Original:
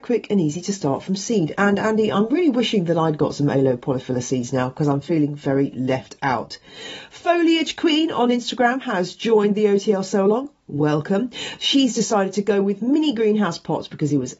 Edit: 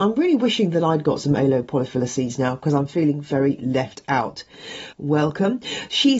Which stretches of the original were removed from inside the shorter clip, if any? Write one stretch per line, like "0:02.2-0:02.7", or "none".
0:07.1-0:10.6